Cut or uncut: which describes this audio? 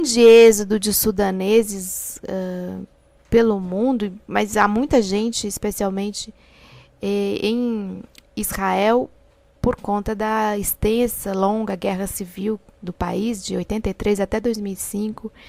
uncut